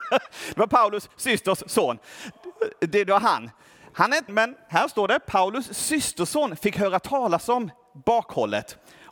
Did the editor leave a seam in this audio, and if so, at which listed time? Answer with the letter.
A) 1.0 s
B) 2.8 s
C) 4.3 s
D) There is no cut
C